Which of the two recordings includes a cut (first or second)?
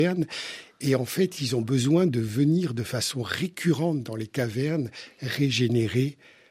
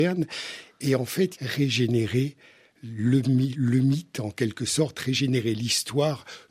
second